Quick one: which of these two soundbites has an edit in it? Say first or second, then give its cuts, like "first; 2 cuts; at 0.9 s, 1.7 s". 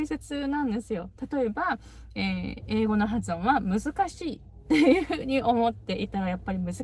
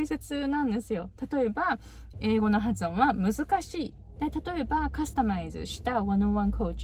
second; 2 cuts; at 2.1 s, 4.2 s